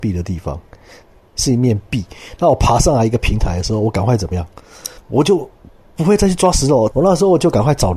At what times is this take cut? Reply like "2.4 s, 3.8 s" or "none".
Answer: 5.0 s, 6.9 s